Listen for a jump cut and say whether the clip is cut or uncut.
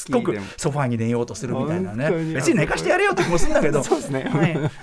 uncut